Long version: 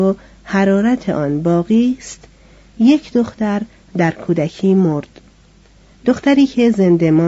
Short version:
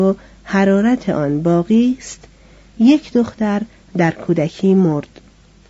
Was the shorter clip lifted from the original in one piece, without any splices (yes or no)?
yes